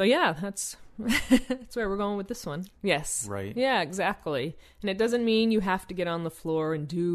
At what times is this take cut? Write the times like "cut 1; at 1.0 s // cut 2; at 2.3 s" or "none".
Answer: cut 1; at 2.7 s